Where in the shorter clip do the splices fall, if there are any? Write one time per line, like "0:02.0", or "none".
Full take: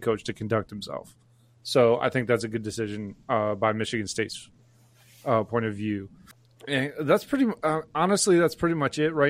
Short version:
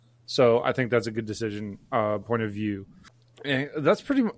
0:02.2